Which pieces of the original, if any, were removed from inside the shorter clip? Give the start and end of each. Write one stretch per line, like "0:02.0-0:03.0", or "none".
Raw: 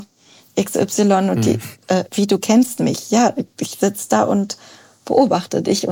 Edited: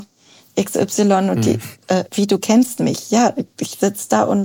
none

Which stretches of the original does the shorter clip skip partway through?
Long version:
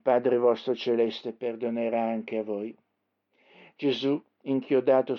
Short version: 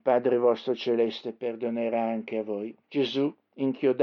0:02.8-0:03.7

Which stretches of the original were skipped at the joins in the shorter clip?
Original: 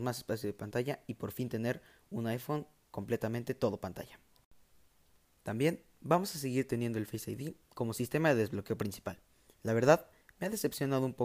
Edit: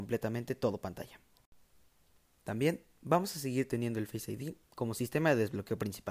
none

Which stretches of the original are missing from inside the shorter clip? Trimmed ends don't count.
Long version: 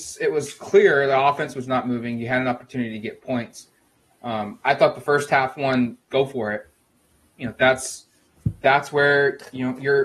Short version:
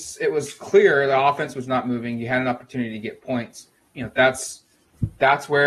0:03.9-0:07.3

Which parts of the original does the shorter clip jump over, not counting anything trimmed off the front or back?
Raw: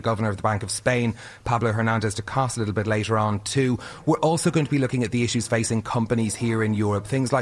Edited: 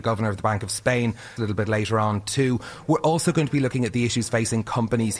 0:01.4-0:02.5

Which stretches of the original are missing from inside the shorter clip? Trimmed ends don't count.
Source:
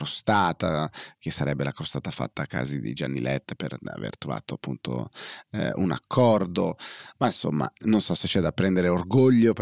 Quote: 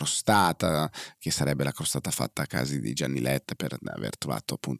none

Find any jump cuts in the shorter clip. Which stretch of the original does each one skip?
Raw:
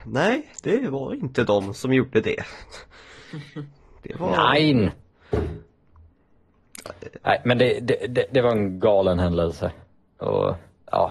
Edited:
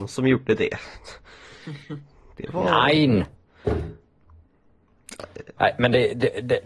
none

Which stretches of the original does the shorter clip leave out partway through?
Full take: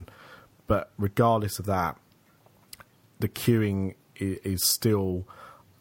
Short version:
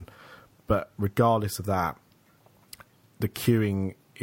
none

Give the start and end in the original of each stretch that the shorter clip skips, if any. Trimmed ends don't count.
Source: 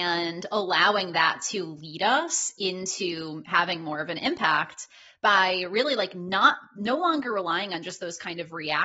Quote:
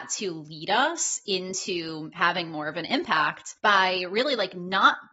0:04.9-0:05.2

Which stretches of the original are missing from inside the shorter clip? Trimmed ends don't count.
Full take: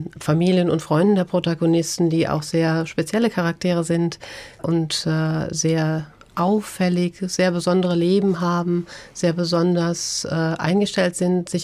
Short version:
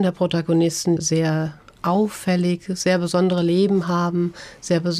0:02.1-0:05.5

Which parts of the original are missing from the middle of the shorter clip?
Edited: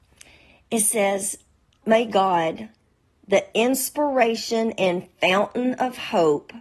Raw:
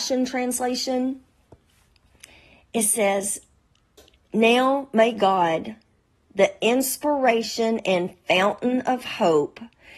0:03.8-0:04.9

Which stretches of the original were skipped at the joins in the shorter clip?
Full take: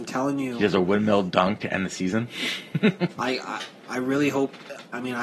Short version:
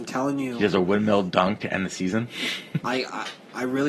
0:02.8-0:03.1

